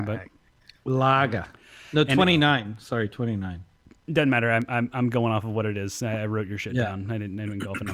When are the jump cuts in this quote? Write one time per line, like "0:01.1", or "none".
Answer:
none